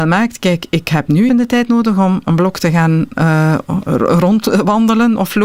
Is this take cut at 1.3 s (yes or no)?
yes